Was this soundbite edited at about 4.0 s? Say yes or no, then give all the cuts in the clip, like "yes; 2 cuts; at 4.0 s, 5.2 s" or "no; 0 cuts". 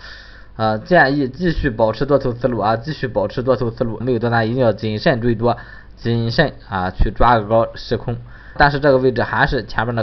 yes; 2 cuts; at 4.0 s, 8.6 s